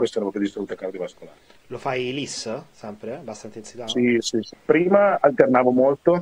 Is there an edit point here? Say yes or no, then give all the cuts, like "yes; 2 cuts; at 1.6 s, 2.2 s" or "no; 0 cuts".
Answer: yes; 1 cut; at 4.5 s